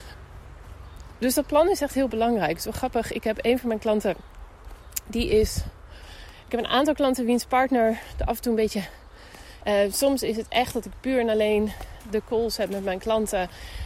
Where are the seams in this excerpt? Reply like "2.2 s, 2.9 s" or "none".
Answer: 9.6 s